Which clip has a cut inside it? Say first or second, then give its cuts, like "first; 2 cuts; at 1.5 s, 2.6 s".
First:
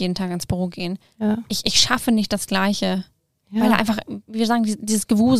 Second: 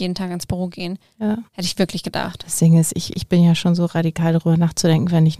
second; 1 cut; at 1.5 s